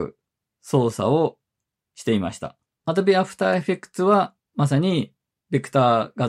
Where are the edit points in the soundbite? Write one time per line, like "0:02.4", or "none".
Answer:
0:02.7